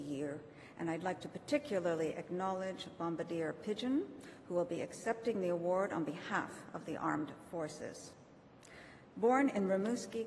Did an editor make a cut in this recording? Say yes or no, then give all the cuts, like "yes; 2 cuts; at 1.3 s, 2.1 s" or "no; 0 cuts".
no; 0 cuts